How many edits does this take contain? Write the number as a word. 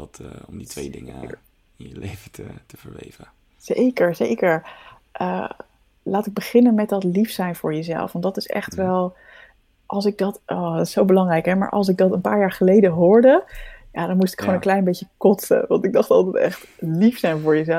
zero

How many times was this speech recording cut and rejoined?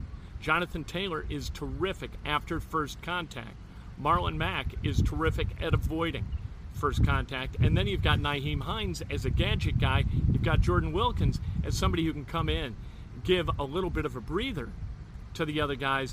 zero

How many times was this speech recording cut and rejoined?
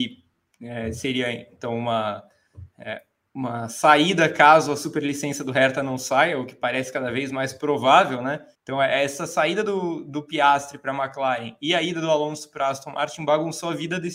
one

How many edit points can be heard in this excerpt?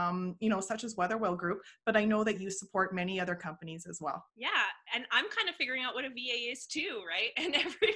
one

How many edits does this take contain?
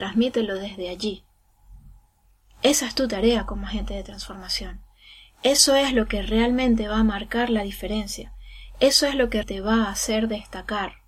one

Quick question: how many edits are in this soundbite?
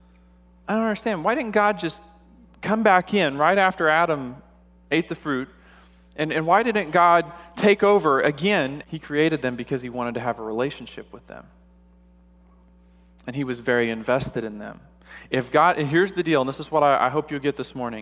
one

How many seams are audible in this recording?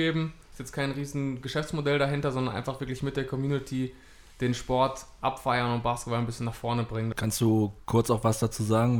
one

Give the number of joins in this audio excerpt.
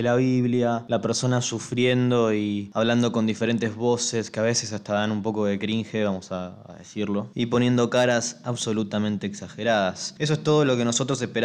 zero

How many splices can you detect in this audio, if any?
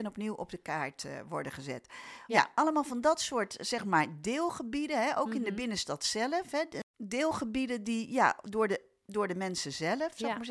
one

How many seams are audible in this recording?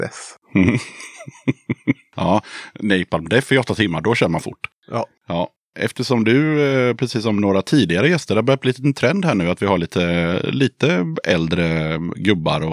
zero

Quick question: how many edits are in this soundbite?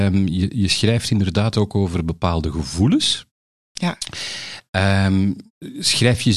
zero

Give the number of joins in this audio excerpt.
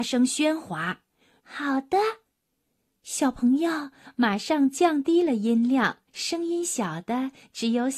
two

